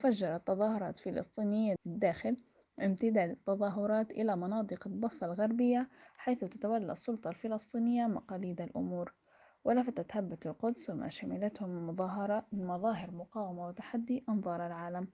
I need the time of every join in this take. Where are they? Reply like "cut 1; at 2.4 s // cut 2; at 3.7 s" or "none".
cut 1; at 1.8 s